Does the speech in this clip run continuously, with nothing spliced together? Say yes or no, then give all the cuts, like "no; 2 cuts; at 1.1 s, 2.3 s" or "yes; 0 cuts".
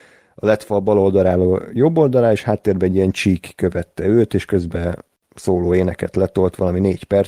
yes; 0 cuts